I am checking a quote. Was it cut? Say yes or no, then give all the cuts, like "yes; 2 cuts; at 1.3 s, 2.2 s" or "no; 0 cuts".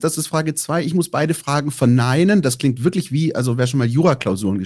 no; 0 cuts